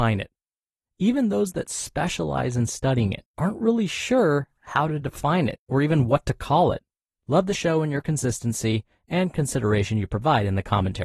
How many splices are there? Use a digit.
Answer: 1